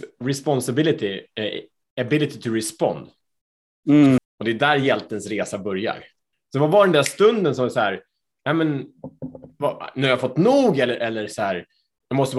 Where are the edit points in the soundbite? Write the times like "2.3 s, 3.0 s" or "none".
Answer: 4.2 s, 6.3 s